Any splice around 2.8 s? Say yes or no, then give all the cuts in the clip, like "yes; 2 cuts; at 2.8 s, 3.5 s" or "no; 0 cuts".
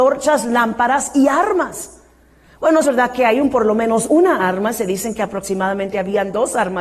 yes; 1 cut; at 2.8 s